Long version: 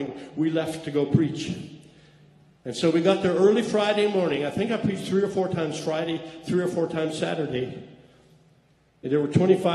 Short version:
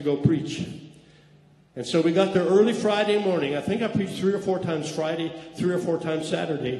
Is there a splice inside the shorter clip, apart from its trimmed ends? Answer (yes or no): no